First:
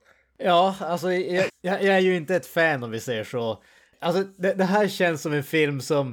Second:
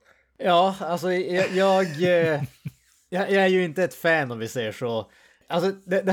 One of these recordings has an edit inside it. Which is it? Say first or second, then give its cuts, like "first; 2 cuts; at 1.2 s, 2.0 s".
first; 1 cut; at 1.5 s